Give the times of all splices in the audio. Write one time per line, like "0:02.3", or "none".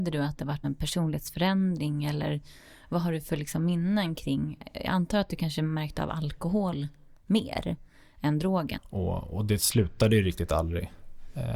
0:08.8

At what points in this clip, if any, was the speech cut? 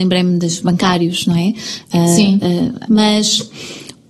0:02.9

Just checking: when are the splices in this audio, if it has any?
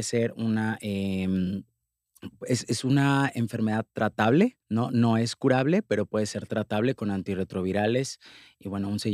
0:04.6

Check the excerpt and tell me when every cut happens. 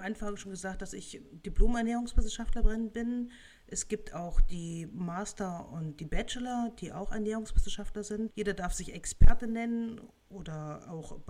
0:08.3

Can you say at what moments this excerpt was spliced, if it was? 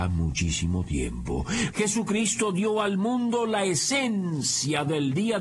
0:01.7

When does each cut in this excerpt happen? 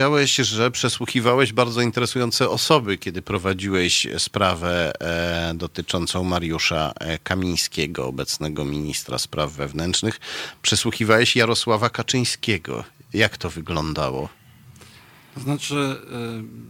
none

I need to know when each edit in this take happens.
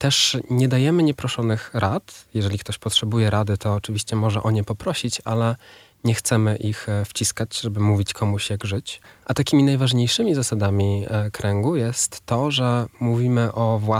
0:09.2

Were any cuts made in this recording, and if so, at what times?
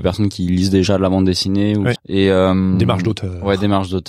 0:02.0

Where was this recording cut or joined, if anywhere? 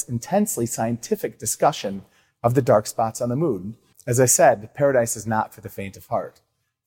0:03.9

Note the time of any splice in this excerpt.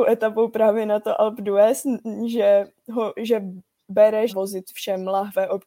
0:04.3

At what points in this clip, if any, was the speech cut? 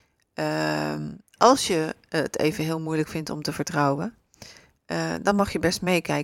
none

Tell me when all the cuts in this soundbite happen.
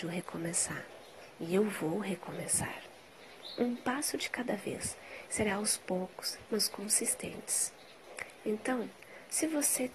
0:05.3
0:06.5

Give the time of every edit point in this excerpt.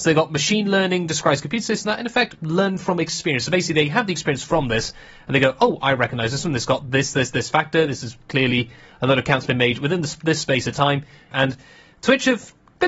0:07.3
0:11.3

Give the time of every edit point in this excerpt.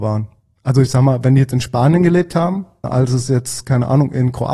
0:02.8

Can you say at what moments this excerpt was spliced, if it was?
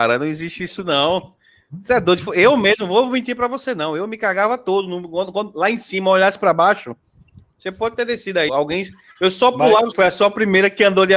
0:08.5
0:09.9

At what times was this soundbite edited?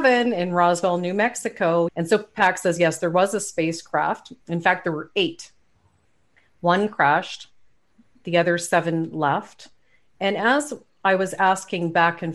0:01.9

